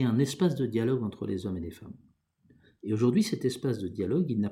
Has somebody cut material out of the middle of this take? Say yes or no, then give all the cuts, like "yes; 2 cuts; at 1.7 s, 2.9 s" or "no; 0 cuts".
no; 0 cuts